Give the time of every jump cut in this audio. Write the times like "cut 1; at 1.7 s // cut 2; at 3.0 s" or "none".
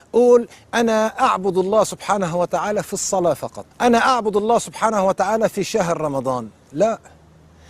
cut 1; at 3.7 s